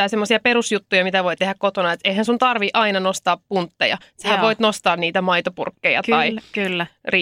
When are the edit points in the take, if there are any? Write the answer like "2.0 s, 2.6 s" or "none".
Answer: none